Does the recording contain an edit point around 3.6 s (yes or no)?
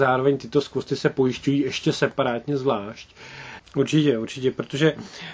yes